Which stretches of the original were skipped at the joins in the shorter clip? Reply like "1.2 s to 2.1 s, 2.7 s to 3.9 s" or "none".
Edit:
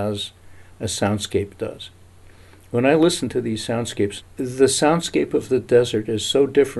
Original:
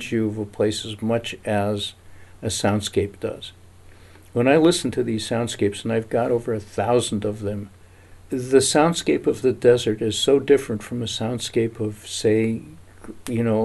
5.8 s to 8.1 s